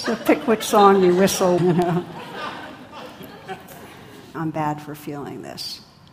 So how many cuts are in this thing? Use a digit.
2